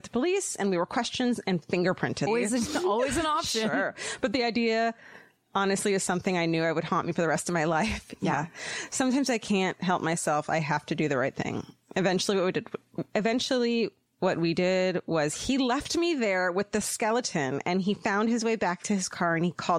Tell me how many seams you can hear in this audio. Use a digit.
1